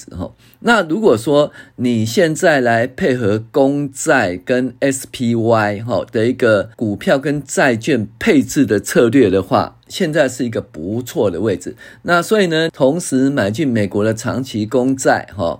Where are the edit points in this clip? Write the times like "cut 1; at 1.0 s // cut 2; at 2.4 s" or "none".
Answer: cut 1; at 6.7 s // cut 2; at 12.7 s